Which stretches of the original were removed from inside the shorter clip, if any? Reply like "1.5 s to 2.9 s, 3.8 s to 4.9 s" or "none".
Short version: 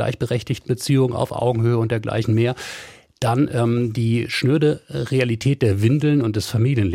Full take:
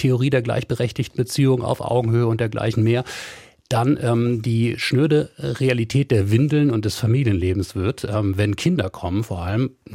none